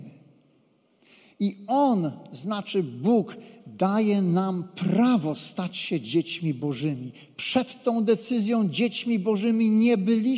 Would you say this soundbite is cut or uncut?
uncut